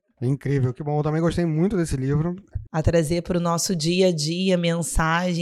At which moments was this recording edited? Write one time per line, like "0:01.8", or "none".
0:02.7

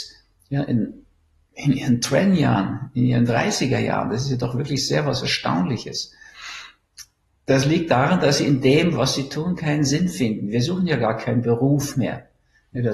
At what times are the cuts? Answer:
none

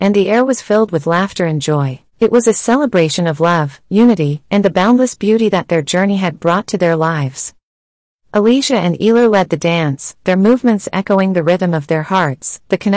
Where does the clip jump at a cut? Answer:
0:02.1

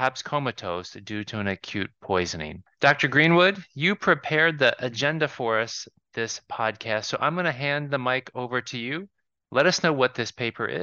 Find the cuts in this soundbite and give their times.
none

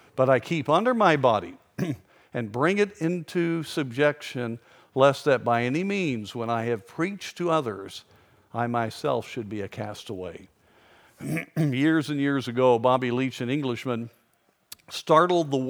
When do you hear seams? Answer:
none

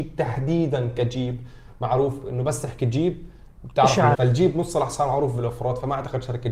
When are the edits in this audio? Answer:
0:04.1

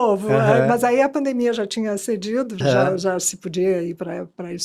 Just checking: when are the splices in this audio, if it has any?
0:02.6

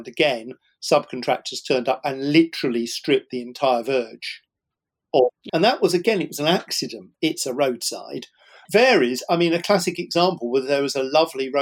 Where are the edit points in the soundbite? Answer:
0:05.5
0:07.1
0:08.6

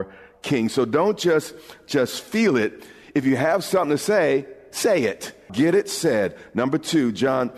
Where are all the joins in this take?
0:05.5

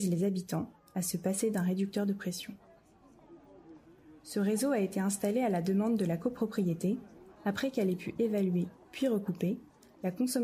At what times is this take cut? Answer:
none

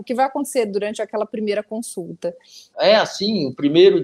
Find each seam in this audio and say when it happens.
0:02.7

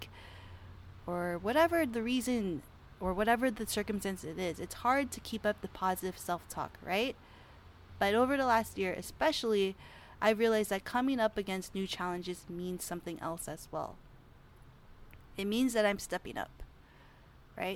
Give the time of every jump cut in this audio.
0:07.9

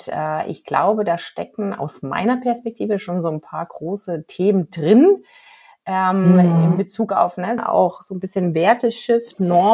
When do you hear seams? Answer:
0:07.6

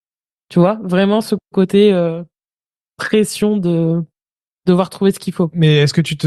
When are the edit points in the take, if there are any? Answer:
none

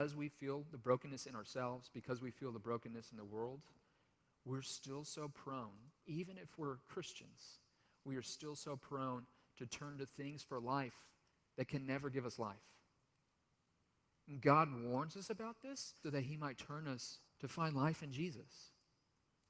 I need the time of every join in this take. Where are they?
0:16.0
0:17.3

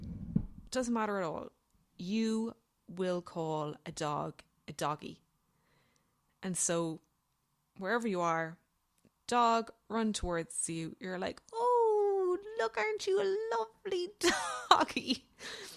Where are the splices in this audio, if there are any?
none

